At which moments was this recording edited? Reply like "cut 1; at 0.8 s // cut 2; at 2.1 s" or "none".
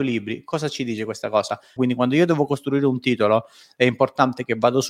cut 1; at 1.8 s

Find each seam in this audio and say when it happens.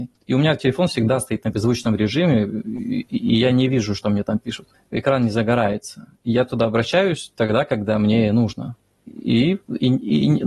none

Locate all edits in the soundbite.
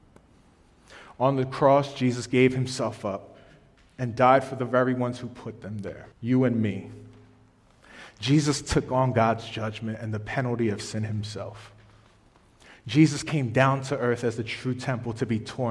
cut 1; at 6.1 s

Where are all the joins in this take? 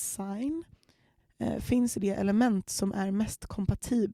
cut 1; at 1.2 s

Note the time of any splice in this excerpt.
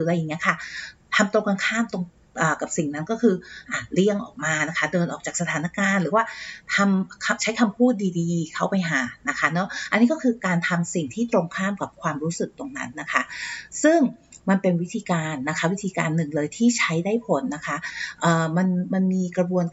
none

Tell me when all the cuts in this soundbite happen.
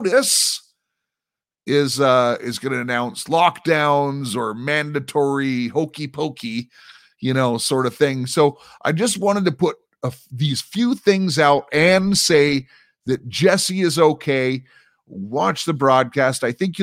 none

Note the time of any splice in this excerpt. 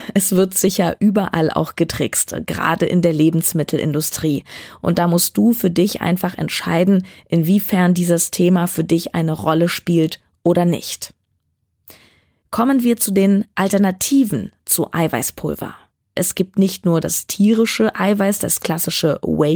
none

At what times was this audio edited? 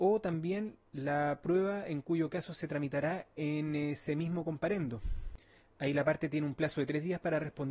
none

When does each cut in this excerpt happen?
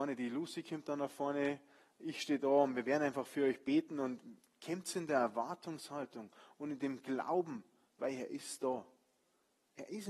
cut 1; at 8.0 s

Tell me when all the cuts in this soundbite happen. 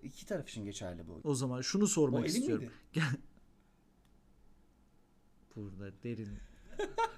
cut 1; at 1.2 s

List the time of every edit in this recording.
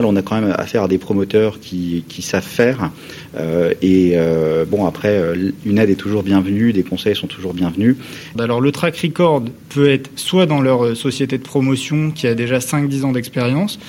cut 1; at 8.4 s

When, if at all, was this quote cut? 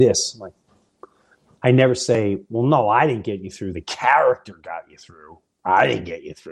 none

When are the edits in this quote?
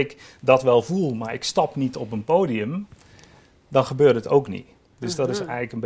none

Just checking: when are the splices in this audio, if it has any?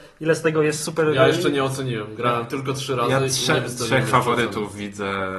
none

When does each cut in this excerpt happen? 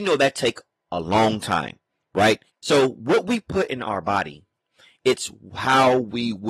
cut 1; at 2.5 s

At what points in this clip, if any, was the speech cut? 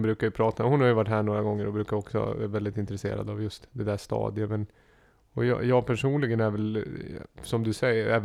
none

